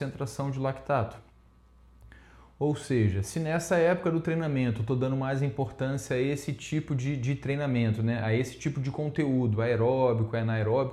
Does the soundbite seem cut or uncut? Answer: uncut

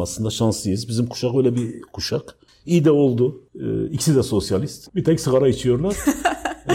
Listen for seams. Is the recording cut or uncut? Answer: cut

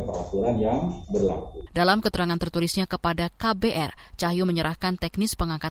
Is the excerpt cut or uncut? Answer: cut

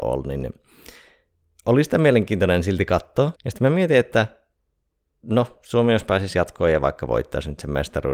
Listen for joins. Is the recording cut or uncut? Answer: cut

